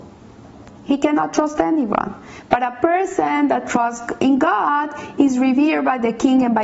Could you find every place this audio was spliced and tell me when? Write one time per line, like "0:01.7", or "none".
none